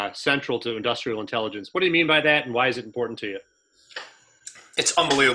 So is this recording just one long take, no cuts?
yes; 0 cuts

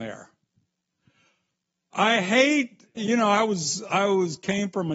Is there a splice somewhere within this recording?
yes; 1 cut; at 3.0 s

